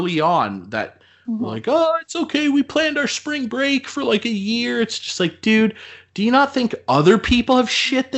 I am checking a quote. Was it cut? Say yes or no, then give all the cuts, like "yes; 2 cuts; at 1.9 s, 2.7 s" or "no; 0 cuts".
no; 0 cuts